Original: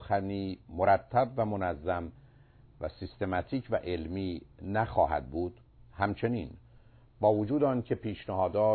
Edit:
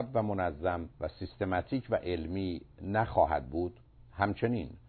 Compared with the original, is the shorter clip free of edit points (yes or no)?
no